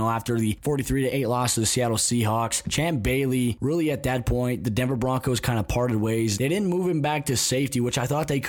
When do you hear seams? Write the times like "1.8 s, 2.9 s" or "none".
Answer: 6.4 s